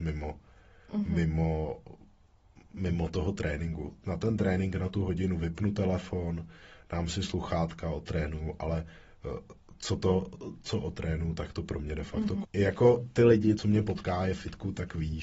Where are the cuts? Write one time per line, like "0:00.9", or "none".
0:12.4
0:13.6